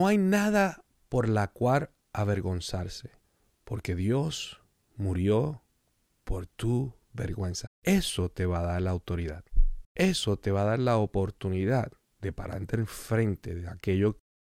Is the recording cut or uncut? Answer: cut